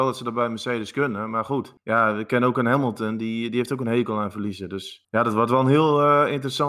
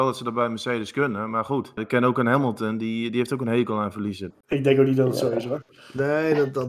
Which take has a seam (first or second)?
second